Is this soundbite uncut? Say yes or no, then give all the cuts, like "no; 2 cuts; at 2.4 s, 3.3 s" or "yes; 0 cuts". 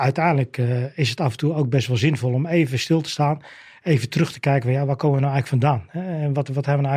yes; 0 cuts